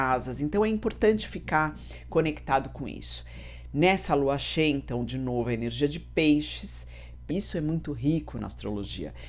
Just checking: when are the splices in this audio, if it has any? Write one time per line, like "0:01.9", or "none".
0:07.3